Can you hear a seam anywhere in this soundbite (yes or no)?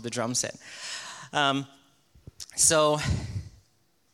no